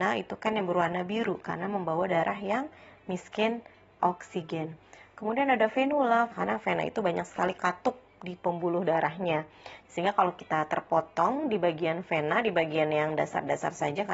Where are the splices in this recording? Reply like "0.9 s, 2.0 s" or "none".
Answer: 6.3 s, 9.9 s